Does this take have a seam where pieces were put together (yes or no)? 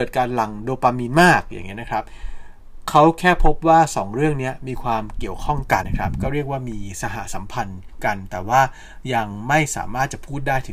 yes